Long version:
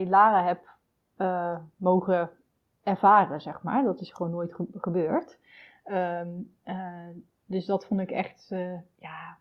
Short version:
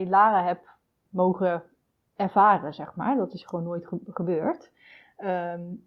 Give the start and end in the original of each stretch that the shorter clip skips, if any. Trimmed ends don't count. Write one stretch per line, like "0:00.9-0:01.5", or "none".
0:01.0-0:01.7